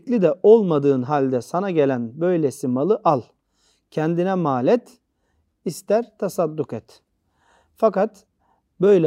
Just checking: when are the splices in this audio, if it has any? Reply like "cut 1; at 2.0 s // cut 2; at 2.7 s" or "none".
cut 1; at 5.5 s